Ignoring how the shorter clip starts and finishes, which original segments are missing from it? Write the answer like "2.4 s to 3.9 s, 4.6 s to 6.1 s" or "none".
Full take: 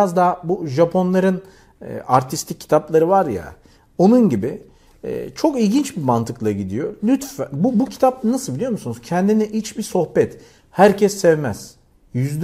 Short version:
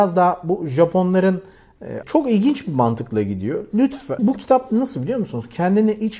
2.0 s to 5.3 s, 7.5 s to 7.7 s